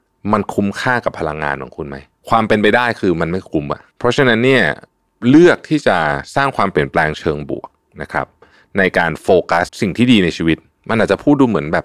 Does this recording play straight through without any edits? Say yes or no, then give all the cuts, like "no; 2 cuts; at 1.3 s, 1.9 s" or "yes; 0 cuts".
no; 1 cut; at 9.7 s